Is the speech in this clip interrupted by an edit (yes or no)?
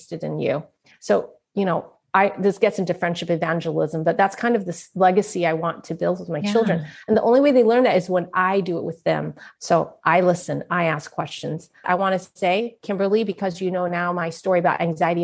yes